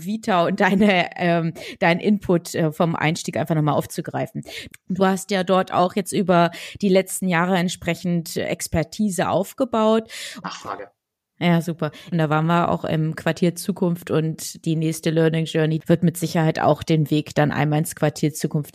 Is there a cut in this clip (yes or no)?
yes